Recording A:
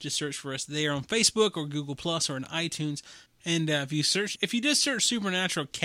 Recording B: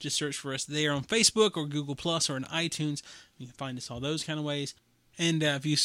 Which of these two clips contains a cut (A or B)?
A